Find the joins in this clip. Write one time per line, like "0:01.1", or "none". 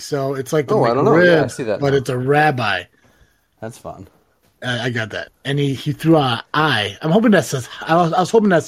0:05.3